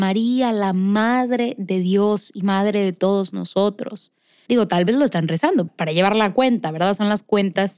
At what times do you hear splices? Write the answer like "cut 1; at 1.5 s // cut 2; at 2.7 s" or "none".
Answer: cut 1; at 4.5 s // cut 2; at 5.7 s